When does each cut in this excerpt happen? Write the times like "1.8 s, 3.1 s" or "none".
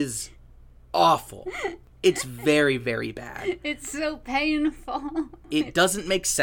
none

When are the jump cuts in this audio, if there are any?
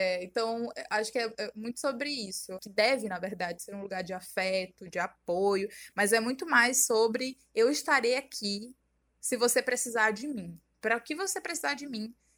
2.6 s, 4.9 s

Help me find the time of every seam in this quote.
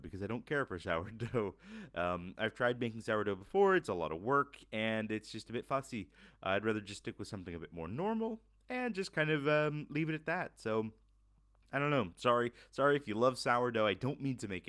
none

